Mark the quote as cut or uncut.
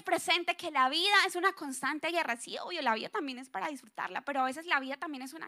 uncut